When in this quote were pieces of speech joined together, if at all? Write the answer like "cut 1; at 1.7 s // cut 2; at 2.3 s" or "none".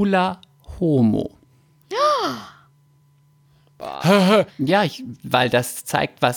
cut 1; at 4.5 s